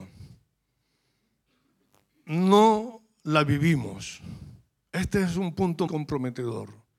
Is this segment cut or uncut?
cut